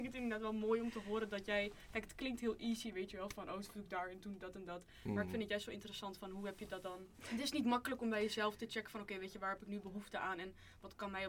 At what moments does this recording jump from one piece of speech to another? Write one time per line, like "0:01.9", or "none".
0:07.1